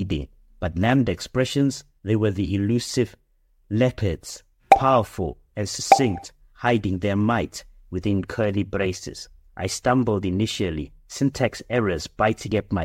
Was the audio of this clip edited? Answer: no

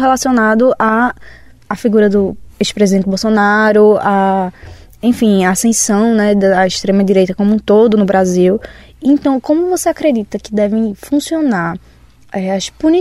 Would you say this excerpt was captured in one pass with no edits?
yes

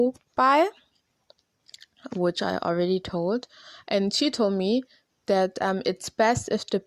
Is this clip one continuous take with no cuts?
yes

